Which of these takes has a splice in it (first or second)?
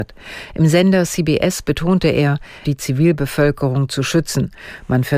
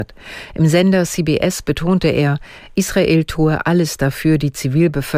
first